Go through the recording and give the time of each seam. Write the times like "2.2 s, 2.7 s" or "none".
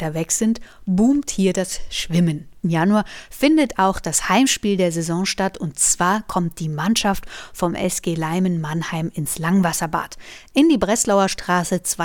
2.6 s